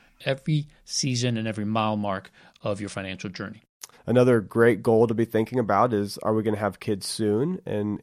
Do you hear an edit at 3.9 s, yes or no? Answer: yes